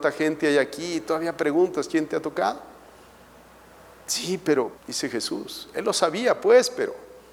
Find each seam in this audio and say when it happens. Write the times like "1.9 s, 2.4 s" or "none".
4.7 s

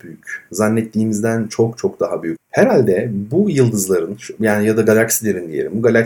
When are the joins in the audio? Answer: 2.4 s

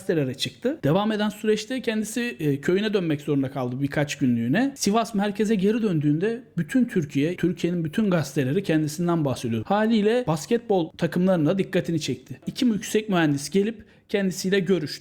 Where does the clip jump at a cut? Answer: 7.4 s, 9.6 s

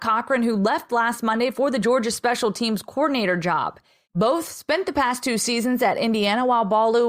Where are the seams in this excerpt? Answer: 4.1 s

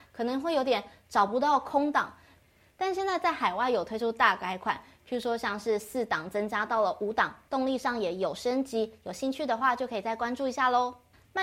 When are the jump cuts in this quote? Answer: none

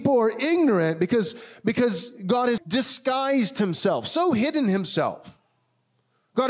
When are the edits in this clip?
2.6 s

